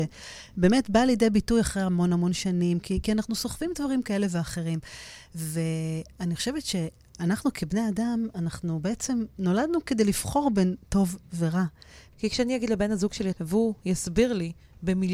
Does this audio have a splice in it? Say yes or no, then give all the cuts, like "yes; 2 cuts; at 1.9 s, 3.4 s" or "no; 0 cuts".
yes; 2 cuts; at 12.1 s, 13.3 s